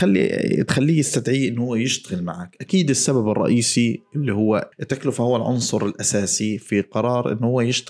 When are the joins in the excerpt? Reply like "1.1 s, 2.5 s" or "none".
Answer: 4.7 s